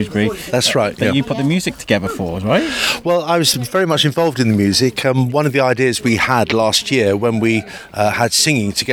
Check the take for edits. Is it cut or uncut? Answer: uncut